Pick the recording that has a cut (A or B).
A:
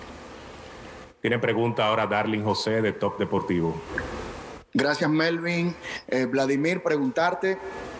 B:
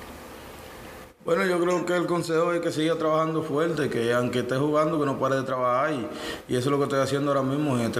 B